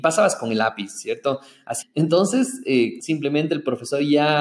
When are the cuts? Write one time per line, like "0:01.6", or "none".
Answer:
0:01.8
0:03.0